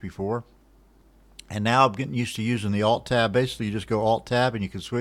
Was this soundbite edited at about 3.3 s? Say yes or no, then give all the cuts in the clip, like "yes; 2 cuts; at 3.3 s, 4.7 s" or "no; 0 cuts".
no; 0 cuts